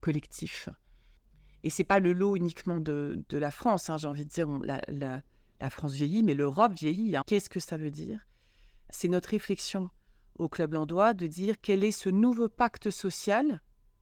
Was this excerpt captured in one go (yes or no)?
no